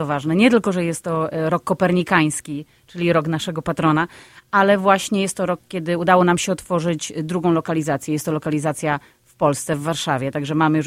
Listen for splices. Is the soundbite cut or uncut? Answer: uncut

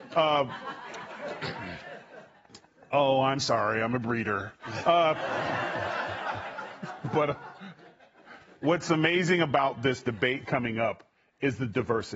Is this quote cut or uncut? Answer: uncut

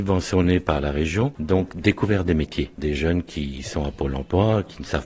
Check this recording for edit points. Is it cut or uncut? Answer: uncut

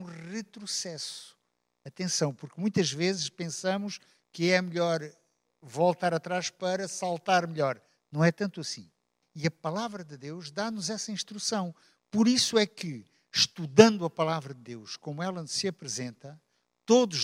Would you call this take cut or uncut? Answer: cut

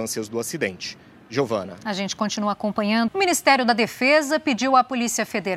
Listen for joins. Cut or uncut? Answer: cut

